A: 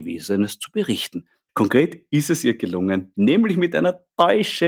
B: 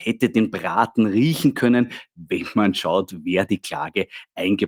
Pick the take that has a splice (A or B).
A